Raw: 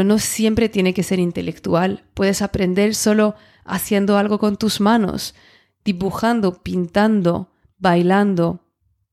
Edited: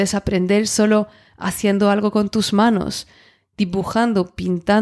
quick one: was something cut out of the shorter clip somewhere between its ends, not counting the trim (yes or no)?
no